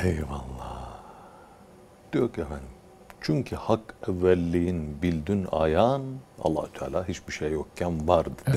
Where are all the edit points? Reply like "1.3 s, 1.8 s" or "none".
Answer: 6.3 s